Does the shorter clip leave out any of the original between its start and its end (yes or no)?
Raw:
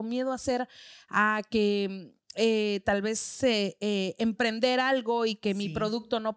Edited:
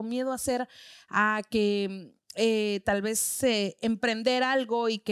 yes